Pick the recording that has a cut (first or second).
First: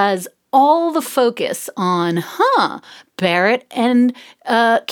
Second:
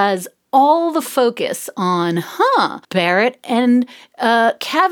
second